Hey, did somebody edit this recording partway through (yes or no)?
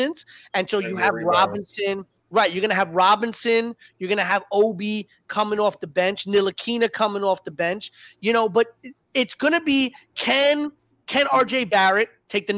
no